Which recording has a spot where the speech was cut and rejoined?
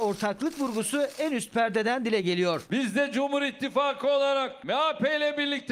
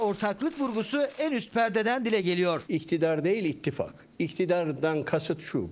second; 1 cut; at 2.7 s

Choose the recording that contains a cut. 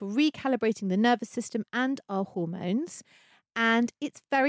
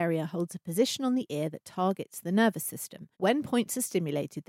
second; 1 cut; at 3.1 s

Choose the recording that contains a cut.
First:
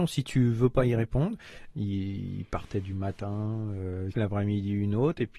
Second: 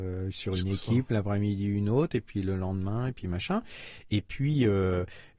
first; 2 cuts; at 1.7 s, 4.1 s

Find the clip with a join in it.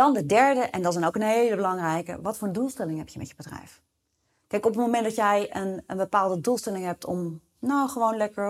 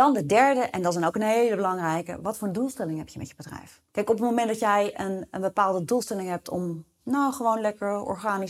second; 1 cut; at 3.9 s

